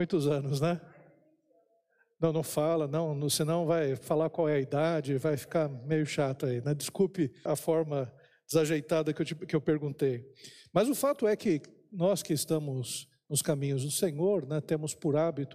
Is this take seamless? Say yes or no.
no